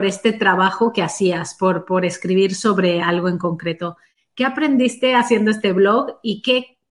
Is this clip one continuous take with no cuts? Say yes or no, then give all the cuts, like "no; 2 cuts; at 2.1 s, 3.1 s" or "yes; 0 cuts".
yes; 0 cuts